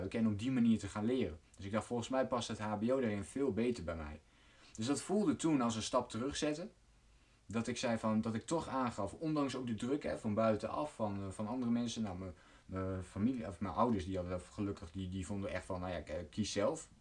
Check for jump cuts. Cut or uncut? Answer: uncut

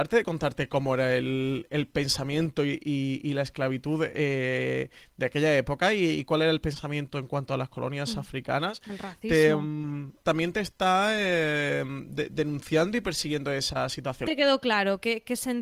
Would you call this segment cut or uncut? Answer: cut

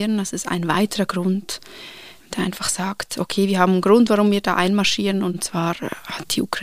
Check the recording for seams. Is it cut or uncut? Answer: uncut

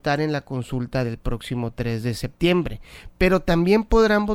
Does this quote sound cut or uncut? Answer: uncut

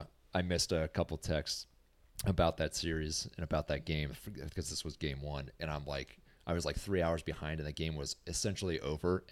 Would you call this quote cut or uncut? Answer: uncut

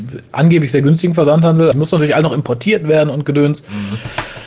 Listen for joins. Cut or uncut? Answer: cut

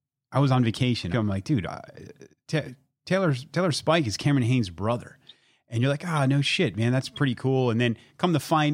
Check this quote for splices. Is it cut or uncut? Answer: cut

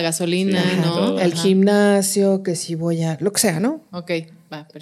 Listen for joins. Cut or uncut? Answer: uncut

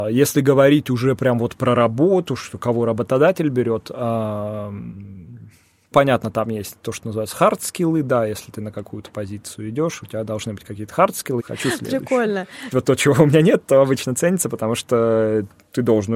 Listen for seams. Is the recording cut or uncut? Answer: cut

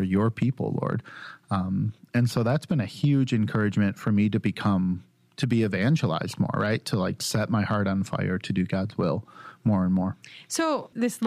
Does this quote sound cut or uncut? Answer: uncut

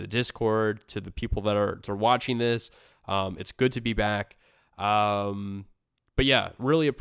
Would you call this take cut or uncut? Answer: uncut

